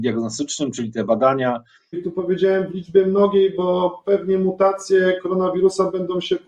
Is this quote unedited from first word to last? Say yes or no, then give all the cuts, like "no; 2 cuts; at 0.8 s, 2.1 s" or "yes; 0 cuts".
no; 1 cut; at 1.9 s